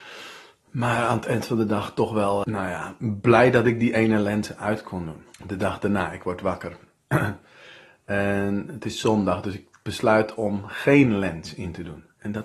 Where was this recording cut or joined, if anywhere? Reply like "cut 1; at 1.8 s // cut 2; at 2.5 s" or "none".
cut 1; at 2.4 s // cut 2; at 5.3 s